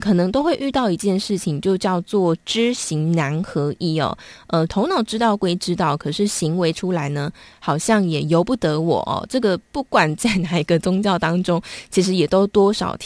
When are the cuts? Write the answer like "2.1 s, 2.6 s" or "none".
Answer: 4.7 s